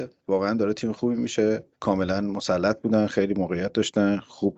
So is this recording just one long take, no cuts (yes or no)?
no